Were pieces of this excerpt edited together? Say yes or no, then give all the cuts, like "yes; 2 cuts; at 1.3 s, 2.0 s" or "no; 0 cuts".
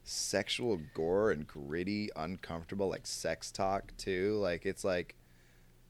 no; 0 cuts